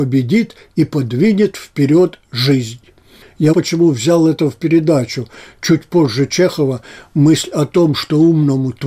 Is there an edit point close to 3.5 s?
yes; 1 cut; at 3.5 s

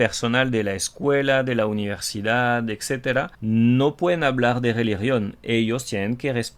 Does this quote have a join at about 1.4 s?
no; 1 cut; at 3.3 s

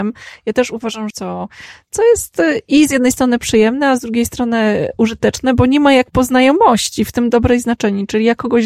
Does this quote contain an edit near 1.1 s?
yes; 1 cut; at 1.1 s

